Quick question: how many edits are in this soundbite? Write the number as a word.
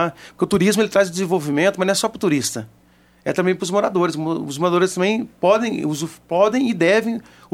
zero